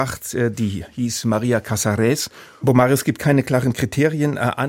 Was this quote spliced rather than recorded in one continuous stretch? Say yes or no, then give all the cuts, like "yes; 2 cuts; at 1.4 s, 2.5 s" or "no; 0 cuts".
yes; 1 cut; at 2.6 s